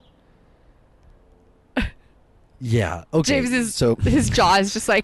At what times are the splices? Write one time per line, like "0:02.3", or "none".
none